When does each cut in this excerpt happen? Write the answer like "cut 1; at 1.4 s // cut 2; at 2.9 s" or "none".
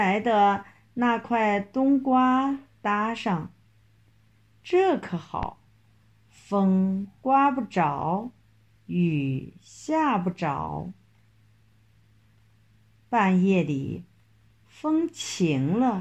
none

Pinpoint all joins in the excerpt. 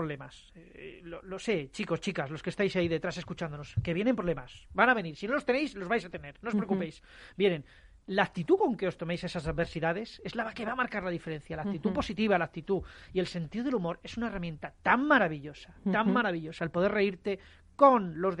none

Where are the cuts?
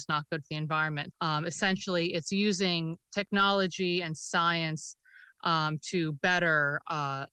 cut 1; at 1.1 s

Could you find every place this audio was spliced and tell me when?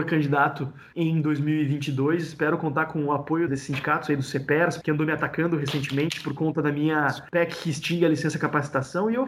cut 1; at 3.5 s // cut 2; at 4.8 s

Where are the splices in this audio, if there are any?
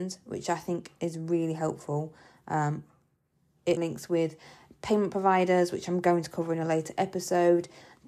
cut 1; at 3.8 s

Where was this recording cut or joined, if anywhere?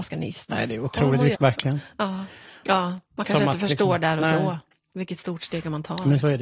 cut 1; at 1.3 s // cut 2; at 2.6 s

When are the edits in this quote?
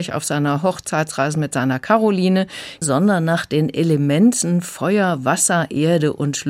cut 1; at 2.8 s

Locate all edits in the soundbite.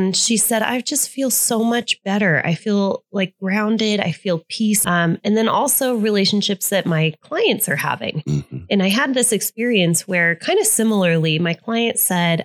cut 1; at 4.8 s

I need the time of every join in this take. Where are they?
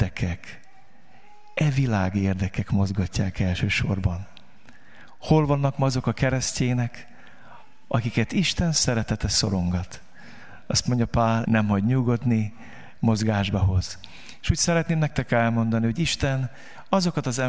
cut 1; at 11.4 s

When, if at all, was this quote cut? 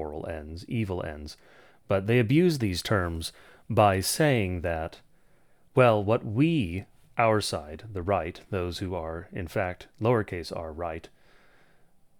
none

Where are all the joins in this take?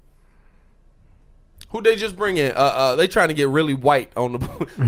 none

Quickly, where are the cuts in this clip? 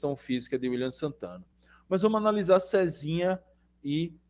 none

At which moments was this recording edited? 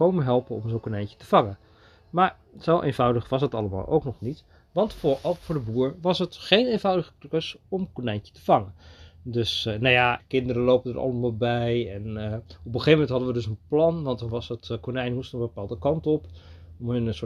cut 1; at 10.2 s

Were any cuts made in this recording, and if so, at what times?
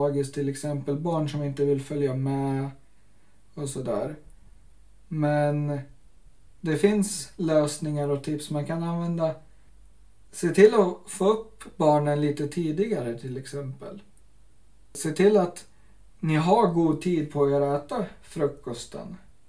none

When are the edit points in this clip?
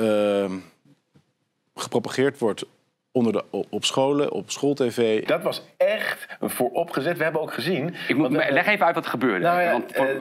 cut 1; at 5.3 s

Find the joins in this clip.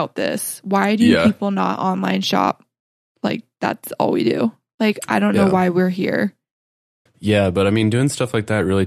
cut 1; at 7.1 s

